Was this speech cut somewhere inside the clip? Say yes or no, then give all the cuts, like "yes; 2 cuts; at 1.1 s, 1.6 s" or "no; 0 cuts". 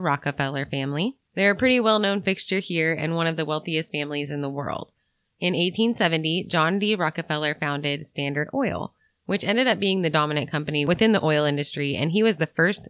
no; 0 cuts